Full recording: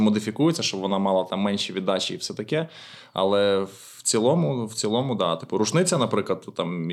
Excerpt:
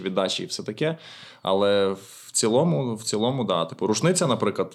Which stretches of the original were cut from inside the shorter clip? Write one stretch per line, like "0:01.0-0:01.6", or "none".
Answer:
none